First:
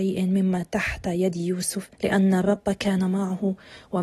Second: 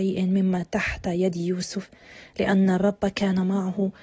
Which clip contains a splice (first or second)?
first